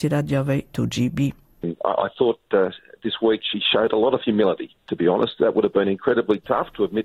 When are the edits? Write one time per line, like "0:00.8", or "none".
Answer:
0:01.6